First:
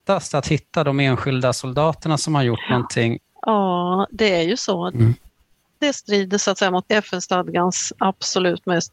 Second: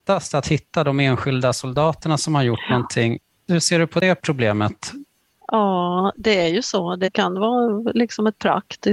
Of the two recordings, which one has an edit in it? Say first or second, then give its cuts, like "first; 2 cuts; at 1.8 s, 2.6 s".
first; 2 cuts; at 3.3 s, 4.9 s